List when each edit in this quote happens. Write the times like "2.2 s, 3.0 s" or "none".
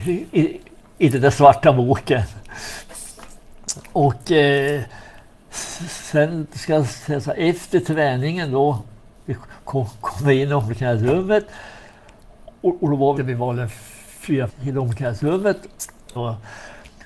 13.2 s, 14.5 s, 16.2 s